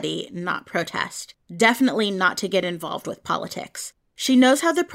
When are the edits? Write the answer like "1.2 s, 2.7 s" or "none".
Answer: none